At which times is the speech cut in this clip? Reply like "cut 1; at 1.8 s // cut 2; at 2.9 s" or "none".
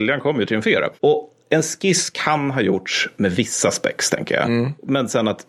none